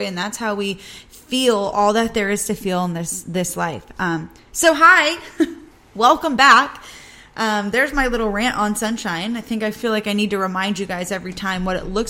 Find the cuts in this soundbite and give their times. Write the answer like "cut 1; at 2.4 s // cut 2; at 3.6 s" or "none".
none

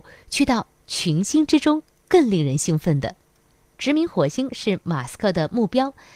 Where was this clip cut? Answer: none

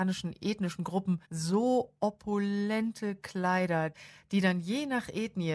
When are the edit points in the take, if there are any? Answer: cut 1; at 1.2 s

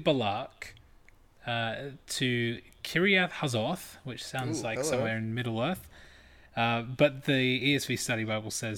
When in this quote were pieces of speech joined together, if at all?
none

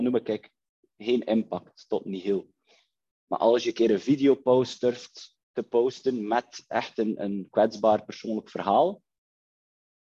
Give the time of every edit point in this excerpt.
cut 1; at 5.4 s

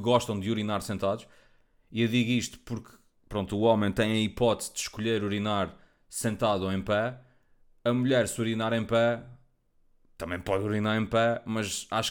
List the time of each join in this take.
none

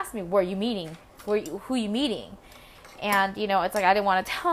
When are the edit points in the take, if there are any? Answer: none

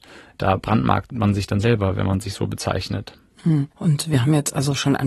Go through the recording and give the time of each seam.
cut 1; at 3.7 s

